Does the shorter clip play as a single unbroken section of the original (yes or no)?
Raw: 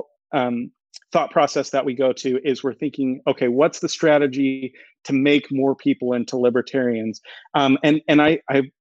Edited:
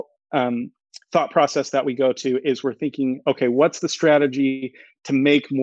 yes